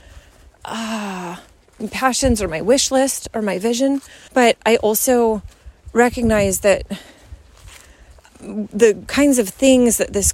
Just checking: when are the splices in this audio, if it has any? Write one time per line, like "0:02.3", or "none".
0:04.3